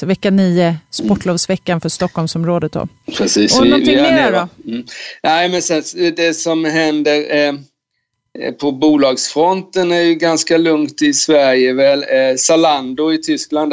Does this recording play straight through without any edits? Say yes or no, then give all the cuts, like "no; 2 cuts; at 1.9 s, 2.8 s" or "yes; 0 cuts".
yes; 0 cuts